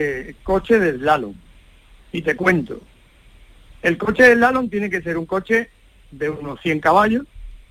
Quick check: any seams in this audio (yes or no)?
no